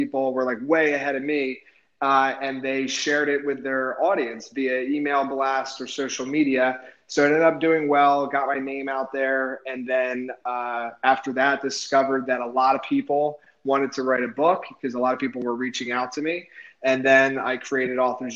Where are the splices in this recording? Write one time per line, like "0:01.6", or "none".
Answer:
none